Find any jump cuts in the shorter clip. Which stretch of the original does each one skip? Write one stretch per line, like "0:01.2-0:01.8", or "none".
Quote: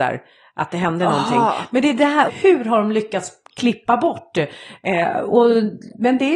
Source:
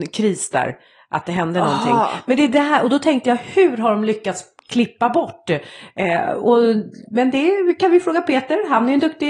0:02.8-0:03.4